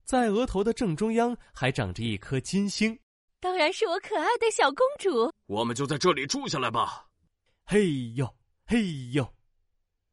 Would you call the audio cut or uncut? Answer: cut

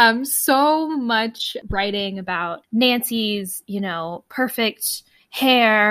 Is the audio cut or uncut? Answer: uncut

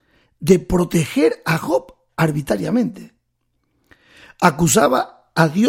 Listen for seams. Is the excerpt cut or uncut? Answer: uncut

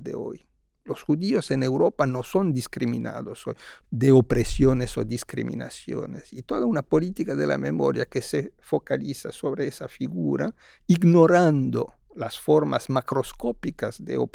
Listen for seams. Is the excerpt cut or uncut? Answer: cut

